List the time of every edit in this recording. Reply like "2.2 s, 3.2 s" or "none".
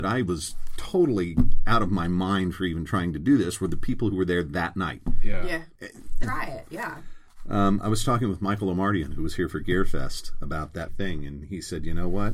6.2 s, 10.9 s

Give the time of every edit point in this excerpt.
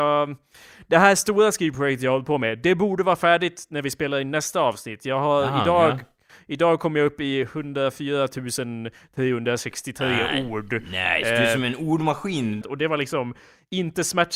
12.6 s

